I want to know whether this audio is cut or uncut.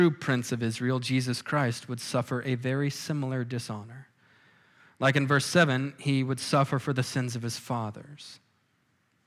uncut